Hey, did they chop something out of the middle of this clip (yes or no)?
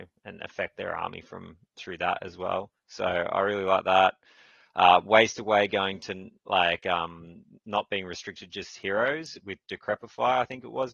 no